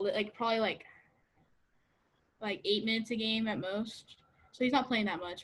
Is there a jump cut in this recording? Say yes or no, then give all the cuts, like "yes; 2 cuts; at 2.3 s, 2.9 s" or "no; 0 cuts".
no; 0 cuts